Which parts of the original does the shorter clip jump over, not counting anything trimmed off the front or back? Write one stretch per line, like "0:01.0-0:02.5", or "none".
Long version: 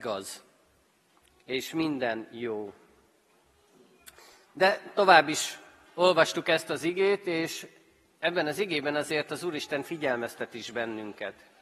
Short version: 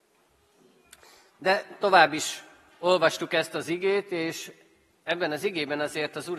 none